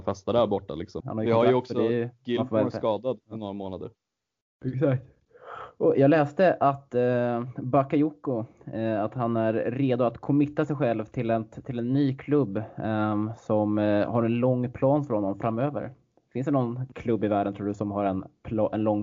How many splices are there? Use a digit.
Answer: 1